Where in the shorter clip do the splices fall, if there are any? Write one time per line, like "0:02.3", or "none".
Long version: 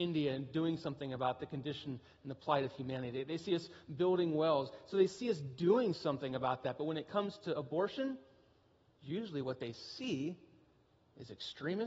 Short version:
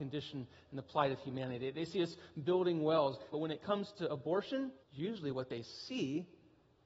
0:03.3
0:04.8